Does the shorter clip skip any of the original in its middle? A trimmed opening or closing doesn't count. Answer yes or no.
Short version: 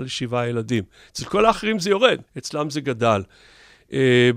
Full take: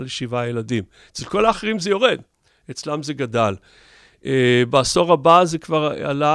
yes